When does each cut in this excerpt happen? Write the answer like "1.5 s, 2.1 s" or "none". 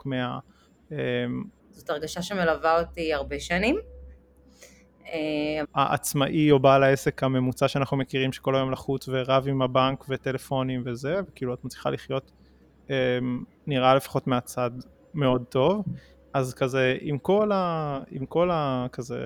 1.6 s, 5.6 s